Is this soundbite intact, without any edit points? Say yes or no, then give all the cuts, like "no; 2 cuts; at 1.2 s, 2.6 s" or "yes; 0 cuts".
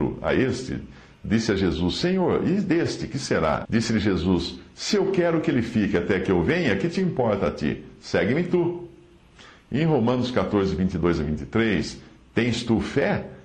no; 1 cut; at 3.6 s